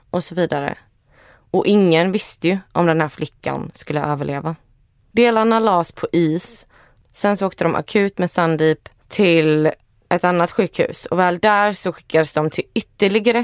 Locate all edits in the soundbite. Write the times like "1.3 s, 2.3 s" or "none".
5.1 s